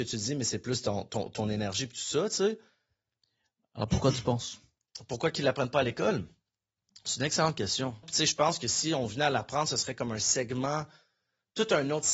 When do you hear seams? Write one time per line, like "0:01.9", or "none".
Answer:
0:08.0